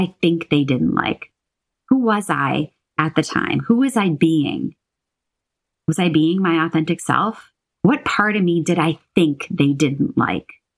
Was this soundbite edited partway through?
yes; 1 cut; at 7.8 s

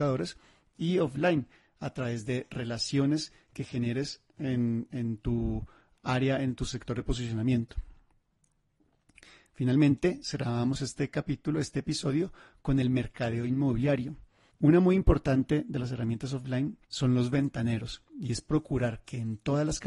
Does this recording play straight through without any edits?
no; 2 cuts; at 14.5 s, 16.8 s

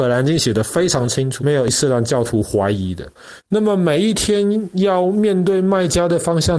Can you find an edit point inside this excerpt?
yes; 2 cuts; at 1.4 s, 3.4 s

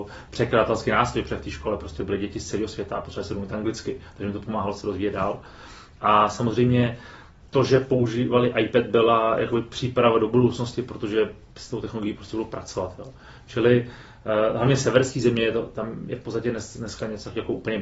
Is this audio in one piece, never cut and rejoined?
yes; 0 cuts

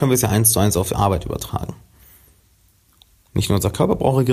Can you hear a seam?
no; 0 cuts

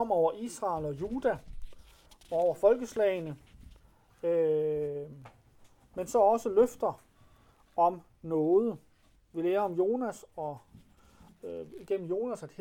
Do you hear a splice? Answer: no; 0 cuts

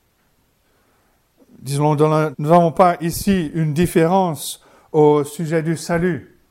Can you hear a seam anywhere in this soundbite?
yes; 1 cut; at 2.3 s

